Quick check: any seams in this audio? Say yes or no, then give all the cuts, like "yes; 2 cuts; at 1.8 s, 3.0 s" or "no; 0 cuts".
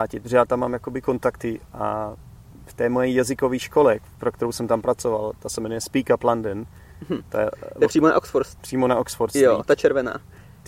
no; 0 cuts